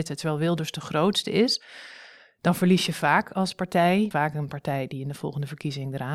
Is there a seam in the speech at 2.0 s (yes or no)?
no